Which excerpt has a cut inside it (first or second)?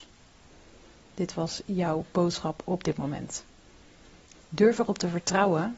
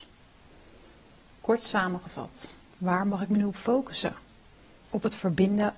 first